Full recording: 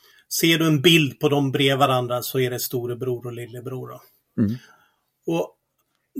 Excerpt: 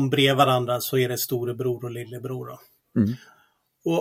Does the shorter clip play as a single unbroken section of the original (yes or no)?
yes